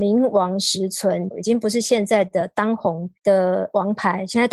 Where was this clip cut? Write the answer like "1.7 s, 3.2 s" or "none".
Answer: 1.3 s, 3.2 s